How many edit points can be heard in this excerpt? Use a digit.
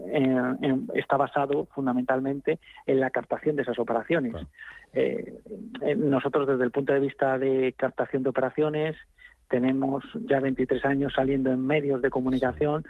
0